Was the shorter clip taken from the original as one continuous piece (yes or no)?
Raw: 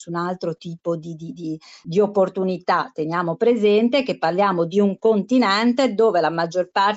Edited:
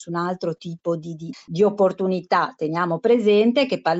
no